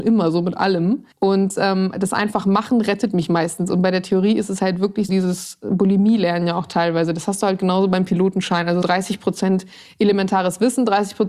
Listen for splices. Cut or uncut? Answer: cut